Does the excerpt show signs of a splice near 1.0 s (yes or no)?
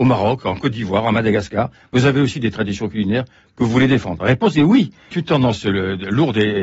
no